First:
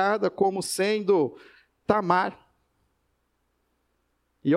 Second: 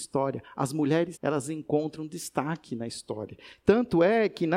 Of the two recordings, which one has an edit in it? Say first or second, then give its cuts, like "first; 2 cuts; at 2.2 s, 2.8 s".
second; 1 cut; at 1.1 s